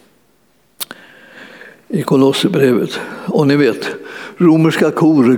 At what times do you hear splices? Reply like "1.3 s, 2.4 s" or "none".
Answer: none